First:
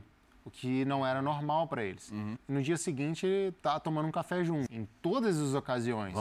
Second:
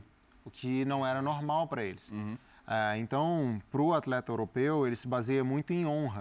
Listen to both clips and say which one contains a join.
first; 3 cuts; at 2.4 s, 3.6 s, 4.7 s

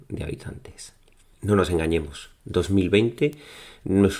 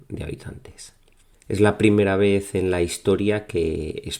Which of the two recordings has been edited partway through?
second; 1 cut; at 1.3 s

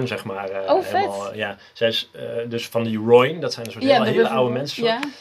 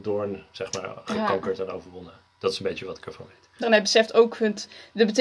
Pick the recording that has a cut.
second; 1 cut; at 3.6 s

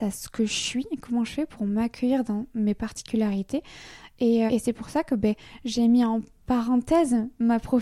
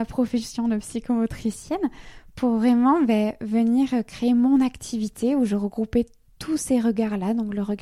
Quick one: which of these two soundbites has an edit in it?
first; 1 cut; at 4.5 s

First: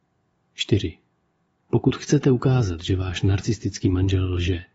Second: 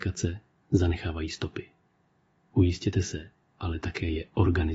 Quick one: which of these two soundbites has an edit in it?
second; 1 cut; at 3.4 s

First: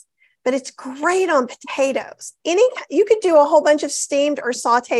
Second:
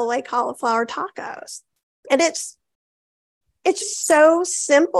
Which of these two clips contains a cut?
second; 2 cuts; at 1.9 s, 3.8 s

